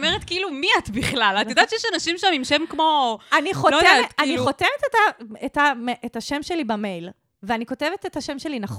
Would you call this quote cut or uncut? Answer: uncut